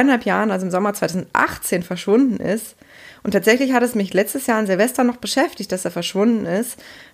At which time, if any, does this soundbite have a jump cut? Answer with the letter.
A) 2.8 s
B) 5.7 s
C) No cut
C